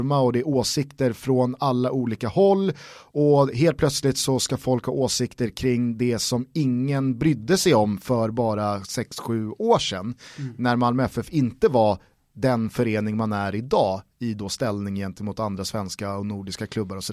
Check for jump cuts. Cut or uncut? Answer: uncut